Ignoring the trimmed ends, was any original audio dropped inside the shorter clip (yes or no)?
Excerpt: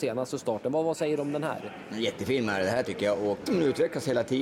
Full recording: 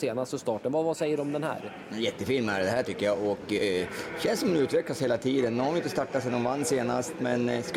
yes